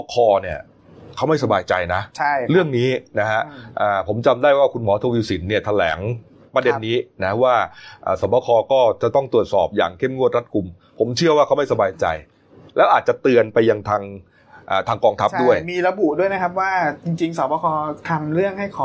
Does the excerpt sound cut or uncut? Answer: uncut